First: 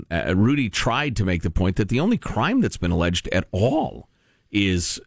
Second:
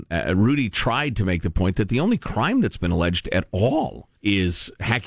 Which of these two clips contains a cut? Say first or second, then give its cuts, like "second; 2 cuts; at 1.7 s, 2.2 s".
second; 1 cut; at 4.2 s